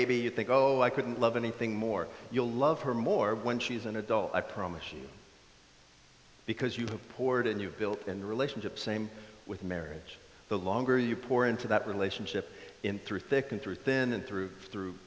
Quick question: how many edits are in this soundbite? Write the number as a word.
zero